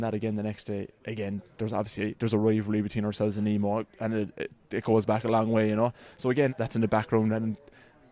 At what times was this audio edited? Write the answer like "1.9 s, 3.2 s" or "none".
6.5 s